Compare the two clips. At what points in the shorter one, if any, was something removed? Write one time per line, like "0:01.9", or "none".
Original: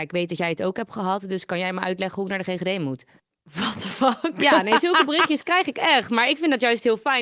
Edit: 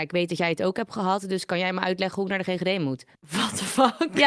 0:03.1